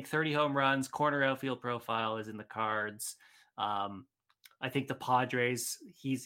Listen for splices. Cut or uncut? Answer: uncut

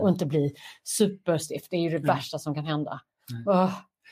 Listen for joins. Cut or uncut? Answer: uncut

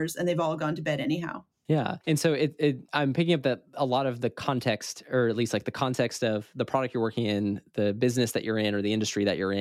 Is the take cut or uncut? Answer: uncut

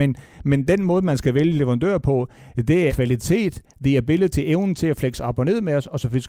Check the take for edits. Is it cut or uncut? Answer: cut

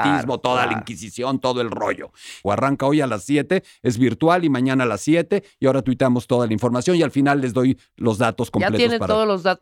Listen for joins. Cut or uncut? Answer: cut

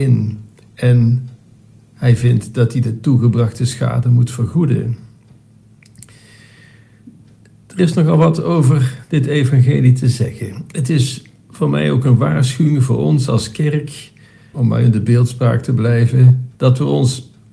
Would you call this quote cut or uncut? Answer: cut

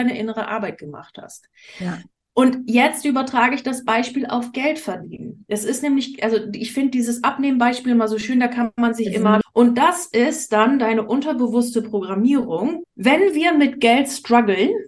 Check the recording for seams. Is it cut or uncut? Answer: cut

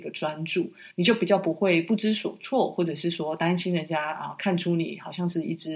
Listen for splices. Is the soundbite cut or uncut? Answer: cut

